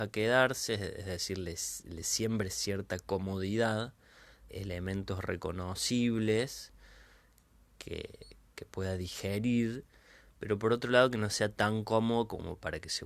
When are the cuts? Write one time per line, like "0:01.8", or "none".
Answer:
0:04.5